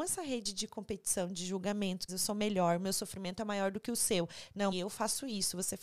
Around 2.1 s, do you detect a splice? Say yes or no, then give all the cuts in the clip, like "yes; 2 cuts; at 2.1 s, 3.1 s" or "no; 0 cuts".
yes; 2 cuts; at 2.1 s, 4.7 s